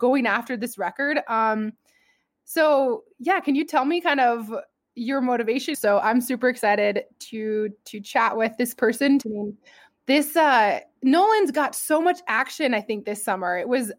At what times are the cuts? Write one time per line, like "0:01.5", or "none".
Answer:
0:05.7
0:09.2